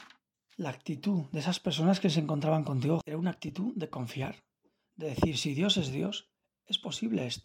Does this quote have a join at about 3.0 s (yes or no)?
yes